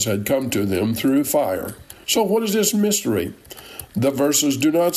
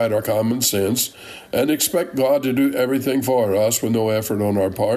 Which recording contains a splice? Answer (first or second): first